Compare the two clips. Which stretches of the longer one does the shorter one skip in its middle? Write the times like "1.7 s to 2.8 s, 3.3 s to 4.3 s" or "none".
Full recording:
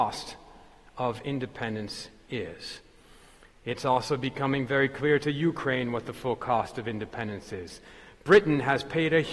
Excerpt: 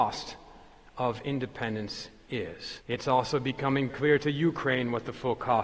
2.8 s to 3.6 s, 4.7 s to 4.9 s

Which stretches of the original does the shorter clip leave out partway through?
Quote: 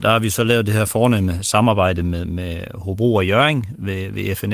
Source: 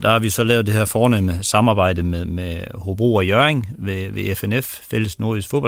none

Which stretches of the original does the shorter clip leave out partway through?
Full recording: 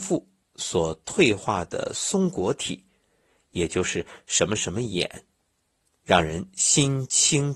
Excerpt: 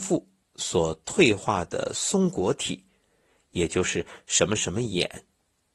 none

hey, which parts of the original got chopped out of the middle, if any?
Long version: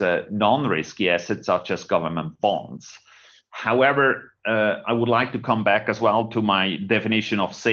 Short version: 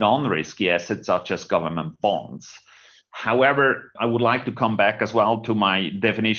4.3 s to 4.8 s

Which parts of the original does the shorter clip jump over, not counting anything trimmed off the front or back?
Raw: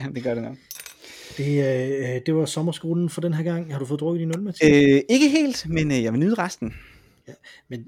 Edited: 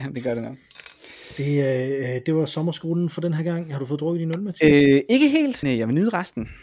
5.6 s to 5.9 s

